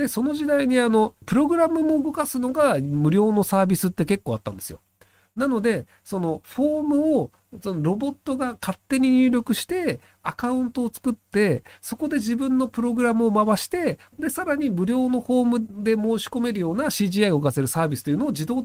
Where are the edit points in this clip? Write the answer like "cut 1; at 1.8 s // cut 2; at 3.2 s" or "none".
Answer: cut 1; at 1.2 s